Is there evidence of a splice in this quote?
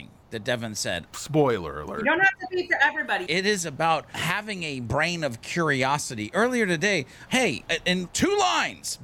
yes; 3 cuts; at 1.1 s, 3.3 s, 7.3 s

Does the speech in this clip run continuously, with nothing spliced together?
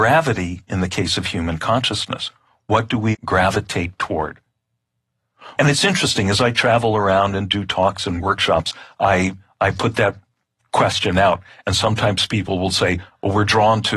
no; 2 cuts; at 3.1 s, 5.6 s

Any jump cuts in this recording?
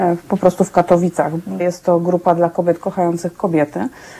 yes; 1 cut; at 1.6 s

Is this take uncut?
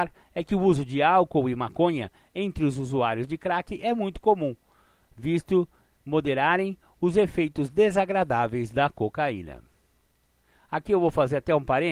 yes; 0 cuts

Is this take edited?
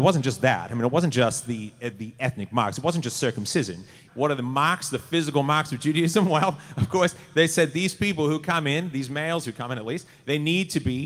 yes; 1 cut; at 4.1 s

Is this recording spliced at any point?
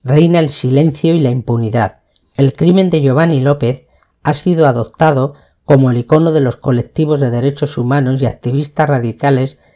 yes; 1 cut; at 2.2 s

